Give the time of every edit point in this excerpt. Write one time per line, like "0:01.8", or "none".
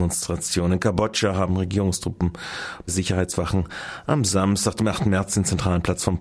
0:02.9